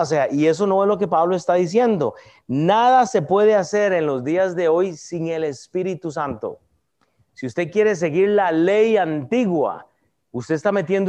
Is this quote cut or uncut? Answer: uncut